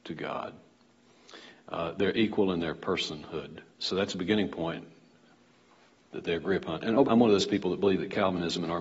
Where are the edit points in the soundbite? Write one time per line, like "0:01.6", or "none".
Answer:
0:03.7
0:07.0